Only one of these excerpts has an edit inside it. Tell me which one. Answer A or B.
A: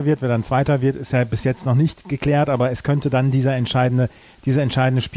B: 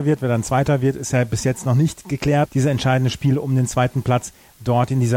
B